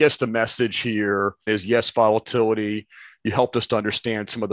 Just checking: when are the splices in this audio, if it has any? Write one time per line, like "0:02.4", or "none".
0:01.5